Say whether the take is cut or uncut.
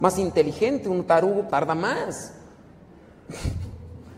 cut